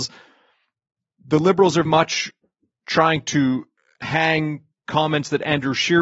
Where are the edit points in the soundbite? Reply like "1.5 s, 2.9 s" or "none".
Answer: 1.9 s

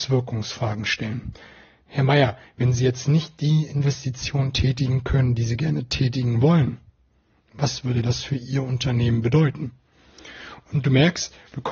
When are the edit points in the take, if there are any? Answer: none

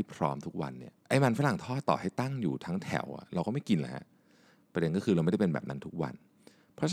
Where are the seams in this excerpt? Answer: 1.0 s

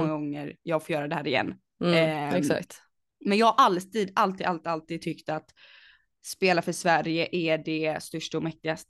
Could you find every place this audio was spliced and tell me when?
none

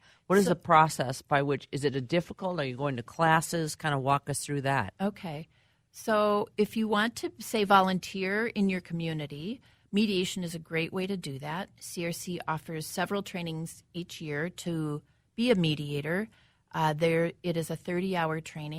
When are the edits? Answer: none

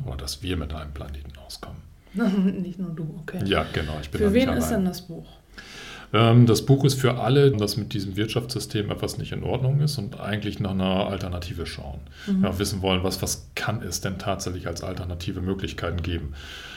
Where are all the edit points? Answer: 7.5 s

